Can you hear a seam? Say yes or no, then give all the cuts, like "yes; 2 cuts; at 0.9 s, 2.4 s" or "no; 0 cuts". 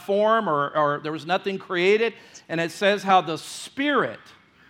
no; 0 cuts